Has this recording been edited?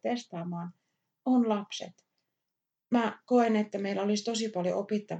no; 0 cuts

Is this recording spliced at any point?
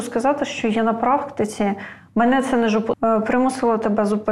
yes; 1 cut; at 2.9 s

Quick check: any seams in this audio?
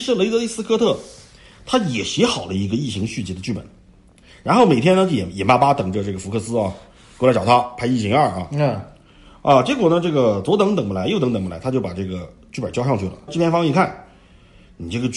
yes; 1 cut; at 13.3 s

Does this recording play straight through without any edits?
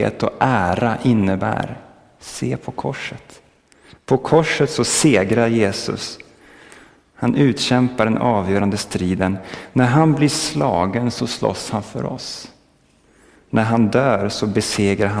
yes; 0 cuts

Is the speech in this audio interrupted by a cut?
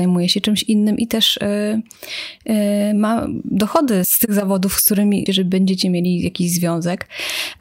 yes; 2 cuts; at 4.0 s, 5.3 s

